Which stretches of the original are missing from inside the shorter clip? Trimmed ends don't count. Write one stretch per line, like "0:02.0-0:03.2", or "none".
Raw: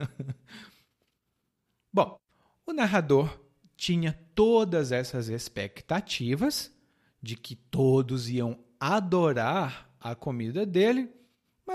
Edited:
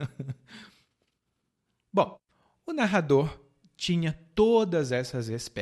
none